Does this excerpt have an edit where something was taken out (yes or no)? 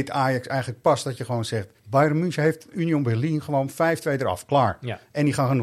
yes